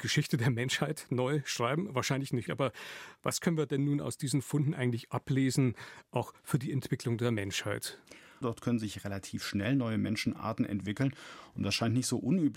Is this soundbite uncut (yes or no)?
no